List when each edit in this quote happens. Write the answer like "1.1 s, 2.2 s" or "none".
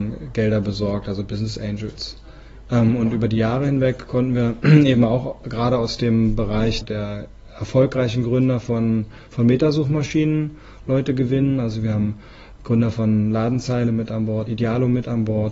6.8 s, 14.5 s